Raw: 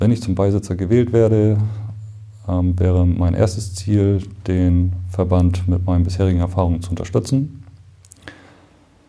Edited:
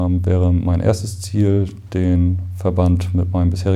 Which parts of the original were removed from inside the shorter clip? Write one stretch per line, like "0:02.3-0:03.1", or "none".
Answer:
none